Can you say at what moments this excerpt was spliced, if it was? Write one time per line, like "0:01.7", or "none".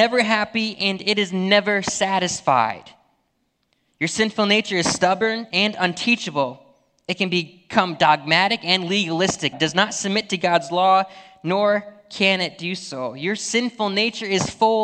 0:09.5